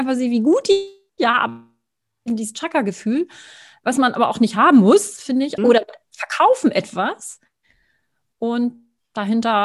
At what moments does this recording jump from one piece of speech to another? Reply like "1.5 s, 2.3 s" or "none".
5.6 s